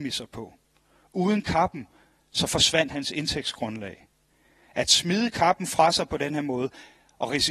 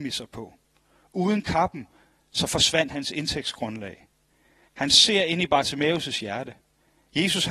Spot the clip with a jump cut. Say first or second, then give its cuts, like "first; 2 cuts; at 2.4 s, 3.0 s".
second; 1 cut; at 4.7 s